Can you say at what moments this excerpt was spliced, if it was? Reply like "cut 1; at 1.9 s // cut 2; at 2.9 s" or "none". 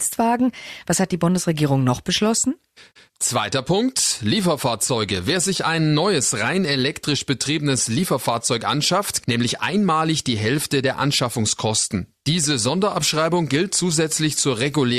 cut 1; at 9.2 s